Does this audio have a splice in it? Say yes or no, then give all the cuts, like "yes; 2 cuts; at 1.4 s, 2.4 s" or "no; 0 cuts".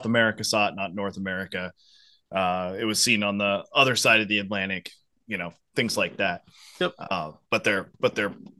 no; 0 cuts